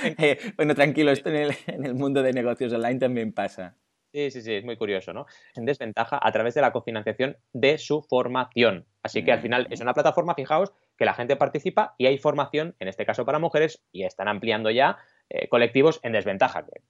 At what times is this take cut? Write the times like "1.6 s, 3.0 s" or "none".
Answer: 5.6 s, 13.8 s